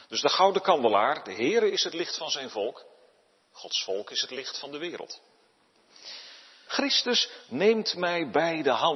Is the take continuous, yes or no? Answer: no